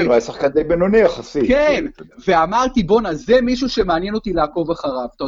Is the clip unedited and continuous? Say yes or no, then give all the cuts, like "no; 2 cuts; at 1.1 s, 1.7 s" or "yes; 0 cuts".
yes; 0 cuts